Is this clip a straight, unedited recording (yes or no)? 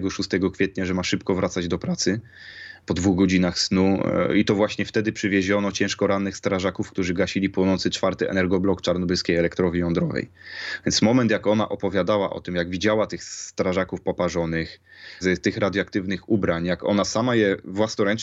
no